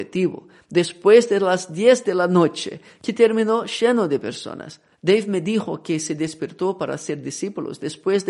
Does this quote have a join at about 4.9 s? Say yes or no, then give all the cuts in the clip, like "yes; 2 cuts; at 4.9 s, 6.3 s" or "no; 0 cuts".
yes; 1 cut; at 4.9 s